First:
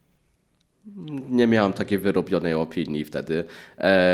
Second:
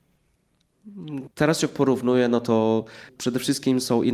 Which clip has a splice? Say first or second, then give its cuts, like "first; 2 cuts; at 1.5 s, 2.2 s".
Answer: second; 1 cut; at 1.3 s